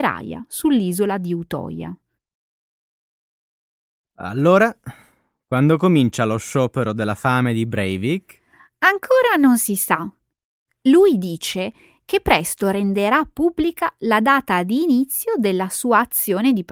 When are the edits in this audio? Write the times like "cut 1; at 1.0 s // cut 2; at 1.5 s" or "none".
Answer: none